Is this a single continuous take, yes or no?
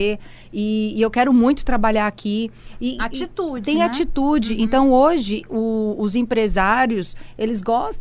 yes